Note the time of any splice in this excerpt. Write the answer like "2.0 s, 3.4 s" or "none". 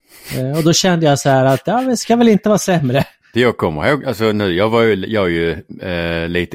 3.3 s